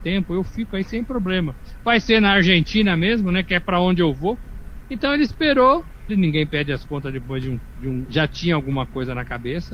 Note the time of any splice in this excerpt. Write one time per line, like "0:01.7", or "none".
0:04.8
0:06.1
0:08.0